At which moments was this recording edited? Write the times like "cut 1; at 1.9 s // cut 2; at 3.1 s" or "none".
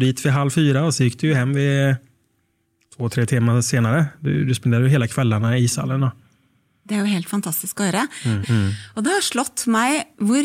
cut 1; at 8.4 s